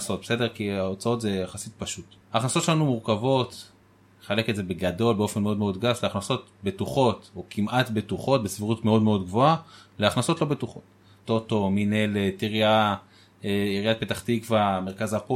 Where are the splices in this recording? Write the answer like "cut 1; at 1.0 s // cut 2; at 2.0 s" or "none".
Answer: cut 1; at 2.2 s // cut 2; at 11.2 s